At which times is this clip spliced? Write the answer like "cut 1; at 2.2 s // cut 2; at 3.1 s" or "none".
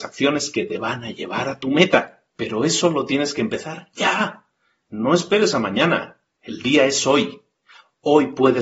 cut 1; at 2.3 s